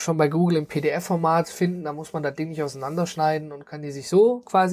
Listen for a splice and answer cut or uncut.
uncut